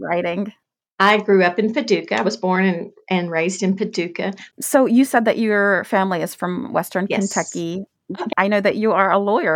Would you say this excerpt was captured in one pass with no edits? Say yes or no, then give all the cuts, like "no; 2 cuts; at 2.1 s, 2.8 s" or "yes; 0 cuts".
no; 2 cuts; at 4.5 s, 8.3 s